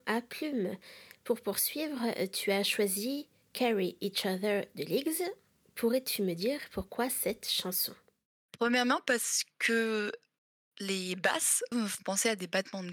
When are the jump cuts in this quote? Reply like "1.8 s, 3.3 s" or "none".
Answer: 11.7 s